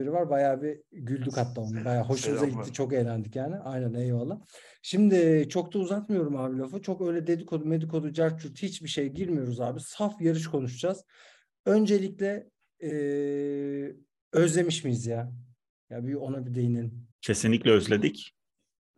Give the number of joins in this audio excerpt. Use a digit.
1